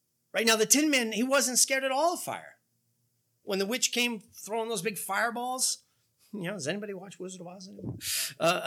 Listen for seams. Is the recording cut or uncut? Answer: uncut